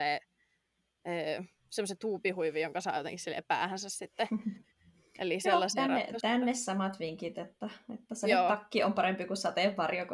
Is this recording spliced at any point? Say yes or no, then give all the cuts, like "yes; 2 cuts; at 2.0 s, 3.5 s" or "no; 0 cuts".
no; 0 cuts